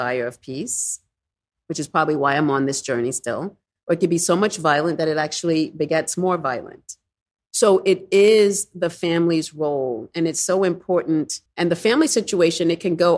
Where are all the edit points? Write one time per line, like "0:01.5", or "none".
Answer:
0:11.5